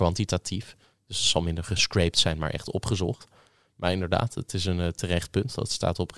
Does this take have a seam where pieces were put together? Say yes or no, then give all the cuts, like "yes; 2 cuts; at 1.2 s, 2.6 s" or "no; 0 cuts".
no; 0 cuts